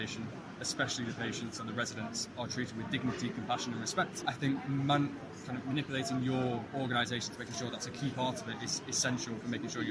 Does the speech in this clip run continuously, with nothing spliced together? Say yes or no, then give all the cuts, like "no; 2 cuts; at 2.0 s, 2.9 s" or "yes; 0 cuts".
yes; 0 cuts